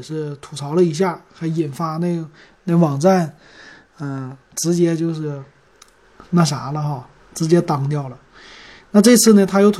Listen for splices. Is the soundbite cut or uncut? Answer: cut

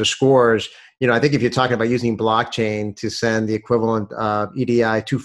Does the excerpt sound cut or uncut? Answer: uncut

